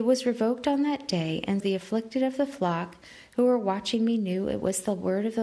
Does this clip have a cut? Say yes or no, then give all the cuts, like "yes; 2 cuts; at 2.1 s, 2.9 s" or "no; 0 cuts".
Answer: yes; 1 cut; at 1.6 s